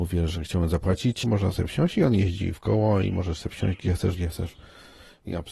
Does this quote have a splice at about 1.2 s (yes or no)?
yes